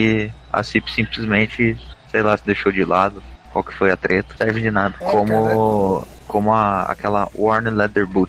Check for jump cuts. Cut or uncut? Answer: uncut